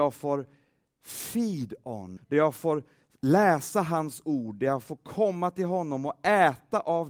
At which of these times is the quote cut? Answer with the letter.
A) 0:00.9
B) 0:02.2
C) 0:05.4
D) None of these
B